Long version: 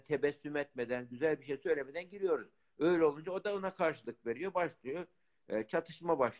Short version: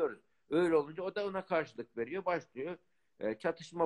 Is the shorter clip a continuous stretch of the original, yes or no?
yes